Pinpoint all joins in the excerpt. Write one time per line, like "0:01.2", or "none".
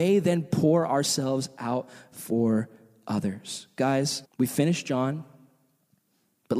0:04.2